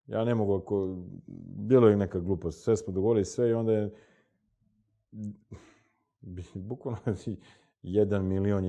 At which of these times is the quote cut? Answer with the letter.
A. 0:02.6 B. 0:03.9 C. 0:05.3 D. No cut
D